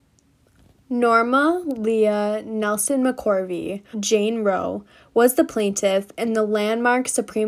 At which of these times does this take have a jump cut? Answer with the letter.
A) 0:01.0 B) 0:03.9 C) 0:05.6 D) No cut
B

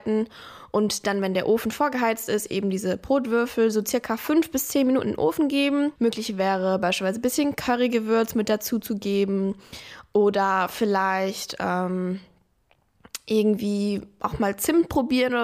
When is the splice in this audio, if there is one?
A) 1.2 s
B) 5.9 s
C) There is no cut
B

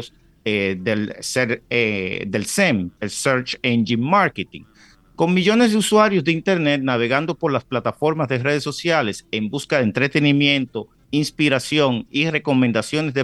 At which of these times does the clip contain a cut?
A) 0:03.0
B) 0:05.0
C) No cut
A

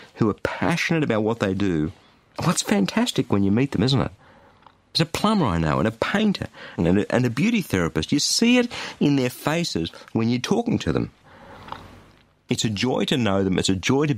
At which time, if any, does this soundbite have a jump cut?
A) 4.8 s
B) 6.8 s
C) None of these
B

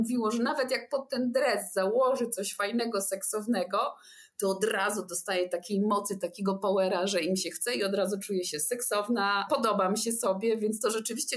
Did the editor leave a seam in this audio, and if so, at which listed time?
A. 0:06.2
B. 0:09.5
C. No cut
B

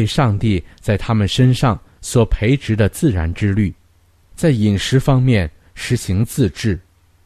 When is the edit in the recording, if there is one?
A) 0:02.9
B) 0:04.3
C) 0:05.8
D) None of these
B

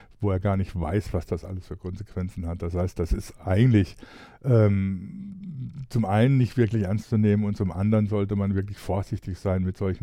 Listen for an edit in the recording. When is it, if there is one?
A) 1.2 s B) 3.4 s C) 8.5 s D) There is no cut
D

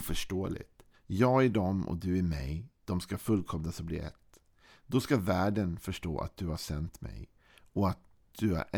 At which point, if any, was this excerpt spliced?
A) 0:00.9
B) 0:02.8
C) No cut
A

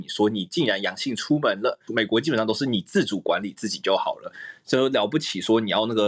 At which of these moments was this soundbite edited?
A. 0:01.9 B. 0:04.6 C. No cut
A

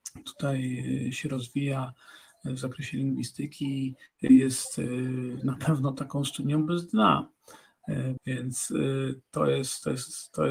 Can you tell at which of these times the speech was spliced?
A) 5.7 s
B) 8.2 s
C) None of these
B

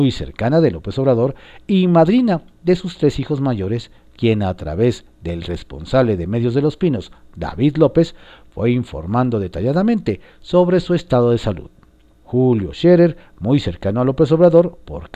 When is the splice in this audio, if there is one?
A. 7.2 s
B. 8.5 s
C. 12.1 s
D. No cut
C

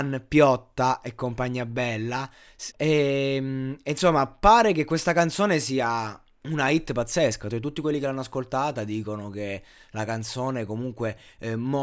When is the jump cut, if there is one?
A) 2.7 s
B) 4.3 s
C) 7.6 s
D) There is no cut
A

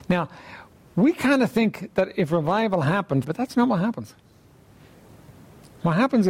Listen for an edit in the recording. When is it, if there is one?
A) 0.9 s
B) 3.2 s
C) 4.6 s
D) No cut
B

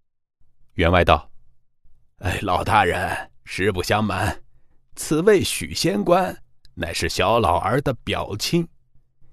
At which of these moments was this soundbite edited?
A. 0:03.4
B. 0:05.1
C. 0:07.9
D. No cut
D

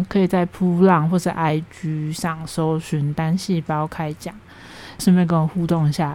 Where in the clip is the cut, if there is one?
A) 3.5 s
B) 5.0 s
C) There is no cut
B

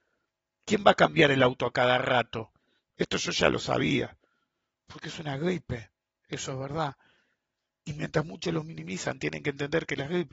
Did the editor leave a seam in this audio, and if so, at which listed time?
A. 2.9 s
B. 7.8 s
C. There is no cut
A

